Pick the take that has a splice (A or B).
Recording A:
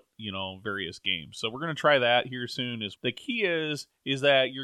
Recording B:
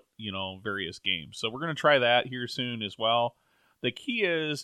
A